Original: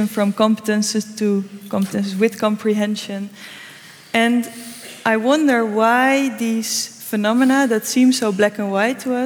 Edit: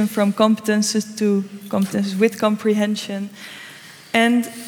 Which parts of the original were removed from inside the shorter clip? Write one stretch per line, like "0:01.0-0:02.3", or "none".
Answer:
none